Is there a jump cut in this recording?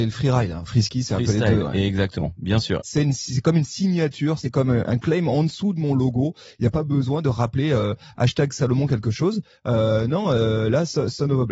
yes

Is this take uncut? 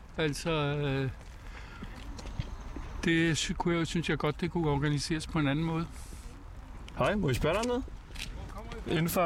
no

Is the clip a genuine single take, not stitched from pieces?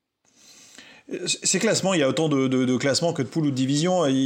yes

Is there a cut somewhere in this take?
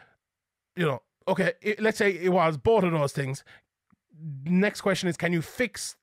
no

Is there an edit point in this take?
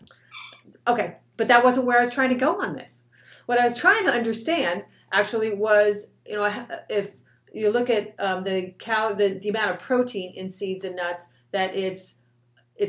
no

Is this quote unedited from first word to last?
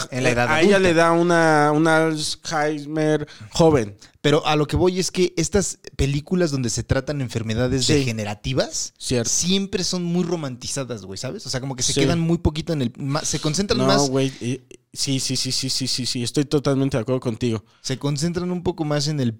yes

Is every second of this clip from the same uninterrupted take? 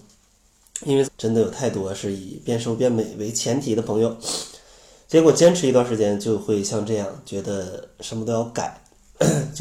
no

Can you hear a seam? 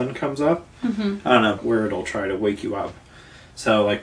yes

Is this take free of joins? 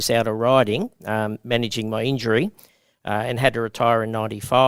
yes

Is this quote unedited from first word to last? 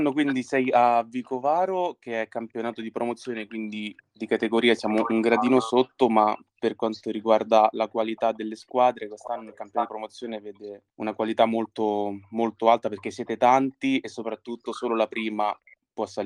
no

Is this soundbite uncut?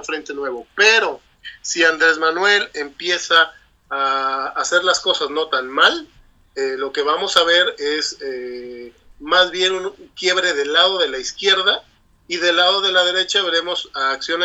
yes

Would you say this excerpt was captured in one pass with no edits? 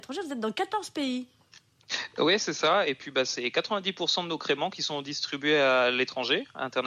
yes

